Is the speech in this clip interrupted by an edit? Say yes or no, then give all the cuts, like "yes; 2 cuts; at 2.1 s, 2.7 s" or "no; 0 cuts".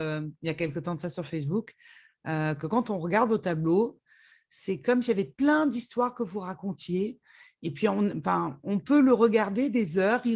no; 0 cuts